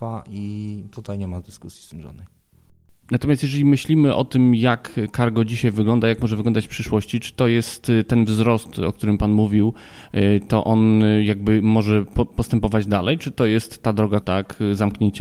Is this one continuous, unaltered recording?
no; 1 cut; at 14.2 s

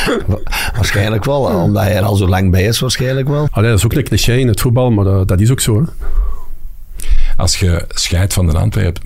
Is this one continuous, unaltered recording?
no; 1 cut; at 3.5 s

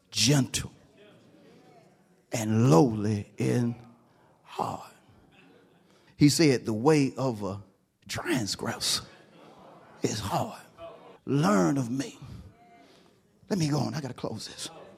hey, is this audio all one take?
no; 2 cuts; at 6.1 s, 11.2 s

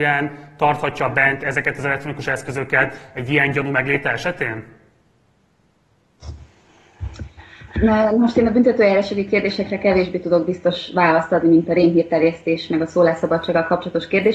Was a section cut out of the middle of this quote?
no; 0 cuts

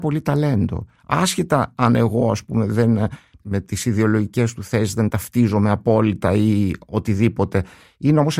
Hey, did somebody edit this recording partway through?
no; 0 cuts

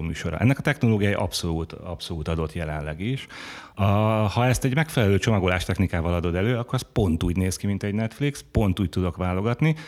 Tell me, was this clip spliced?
yes; 1 cut; at 3.7 s

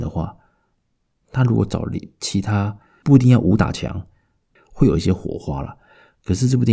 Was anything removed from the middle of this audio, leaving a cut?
yes; 1 cut; at 4.6 s

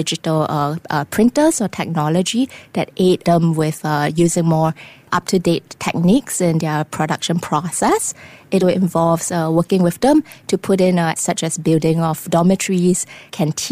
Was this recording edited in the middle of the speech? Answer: yes; 2 cuts; at 8.6 s, 11.2 s

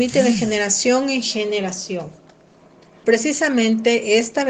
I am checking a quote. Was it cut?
yes; 1 cut; at 3.0 s

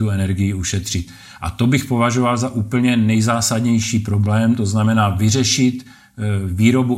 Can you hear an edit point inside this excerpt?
no; 0 cuts

